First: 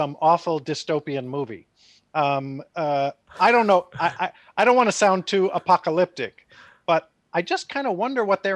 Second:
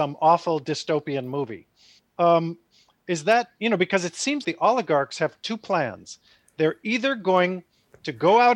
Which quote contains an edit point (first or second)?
second